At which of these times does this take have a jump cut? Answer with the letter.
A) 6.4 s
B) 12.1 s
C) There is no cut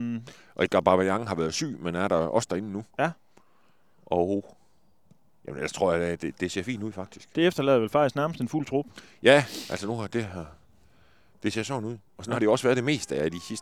A